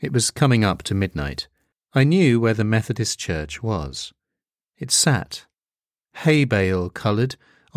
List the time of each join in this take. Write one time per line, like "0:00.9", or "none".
0:01.7

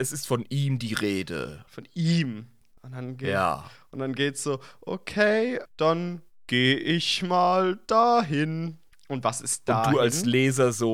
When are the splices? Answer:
0:05.6

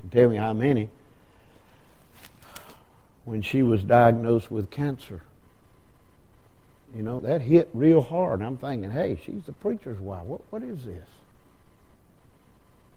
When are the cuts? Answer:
0:07.2

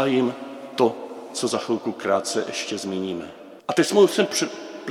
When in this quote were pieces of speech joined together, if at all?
0:03.6

